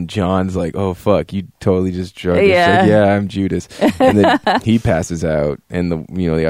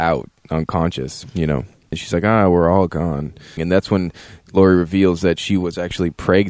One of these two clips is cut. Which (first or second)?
second